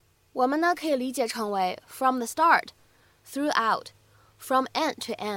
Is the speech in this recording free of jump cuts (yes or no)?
yes